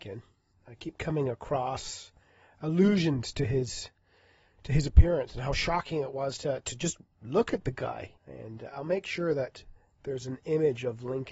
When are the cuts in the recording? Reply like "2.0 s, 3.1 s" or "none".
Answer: 8.2 s